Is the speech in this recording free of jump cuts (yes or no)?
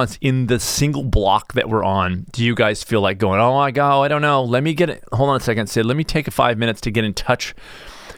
yes